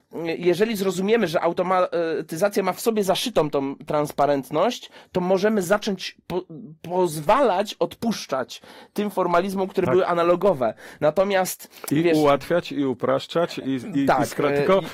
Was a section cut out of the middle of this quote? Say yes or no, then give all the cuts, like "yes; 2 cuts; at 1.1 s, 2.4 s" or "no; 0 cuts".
no; 0 cuts